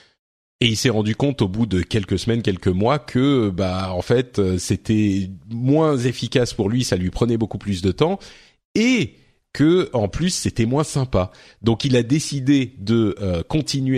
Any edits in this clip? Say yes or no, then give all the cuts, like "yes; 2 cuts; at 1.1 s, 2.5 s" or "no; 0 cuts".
no; 0 cuts